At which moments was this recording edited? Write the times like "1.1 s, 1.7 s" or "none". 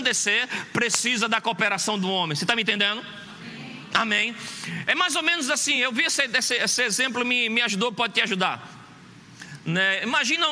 none